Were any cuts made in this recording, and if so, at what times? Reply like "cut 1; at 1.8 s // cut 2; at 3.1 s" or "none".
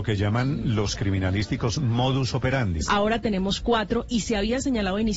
cut 1; at 2.9 s

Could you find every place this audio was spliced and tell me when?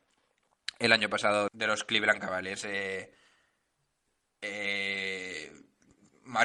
cut 1; at 1.5 s

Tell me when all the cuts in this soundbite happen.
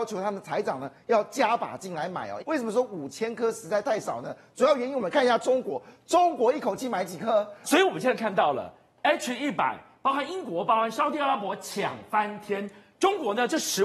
cut 1; at 2.4 s // cut 2; at 7.6 s

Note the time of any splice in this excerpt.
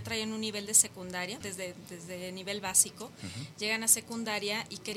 cut 1; at 1.4 s

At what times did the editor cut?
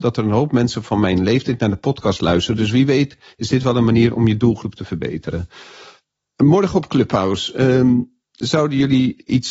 none

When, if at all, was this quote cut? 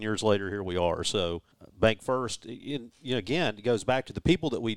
cut 1; at 1.5 s

